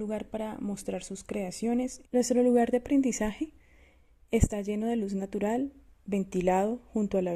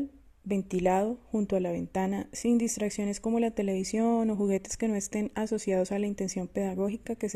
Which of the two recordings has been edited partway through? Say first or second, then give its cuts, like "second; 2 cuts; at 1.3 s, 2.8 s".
first; 1 cut; at 2.0 s